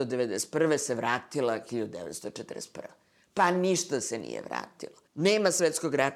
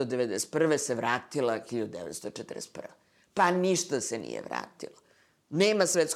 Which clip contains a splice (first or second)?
first